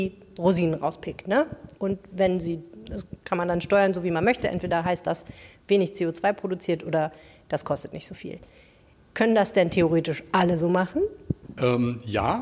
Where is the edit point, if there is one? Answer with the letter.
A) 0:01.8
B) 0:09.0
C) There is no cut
A